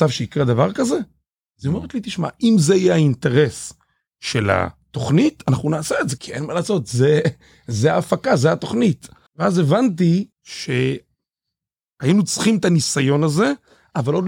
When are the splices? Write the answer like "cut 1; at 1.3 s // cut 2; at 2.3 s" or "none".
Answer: cut 1; at 6.2 s // cut 2; at 9.3 s // cut 3; at 10.3 s